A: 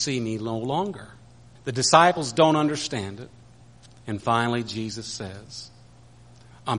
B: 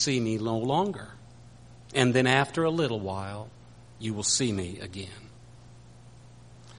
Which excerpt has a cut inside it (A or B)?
A